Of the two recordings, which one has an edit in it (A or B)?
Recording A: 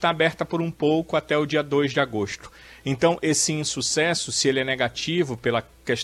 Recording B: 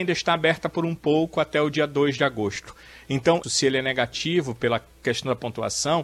B